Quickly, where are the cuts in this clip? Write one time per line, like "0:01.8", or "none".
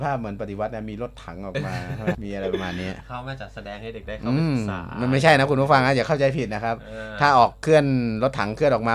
0:02.1